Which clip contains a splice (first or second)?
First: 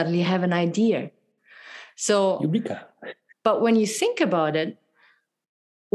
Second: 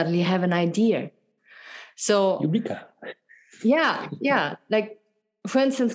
first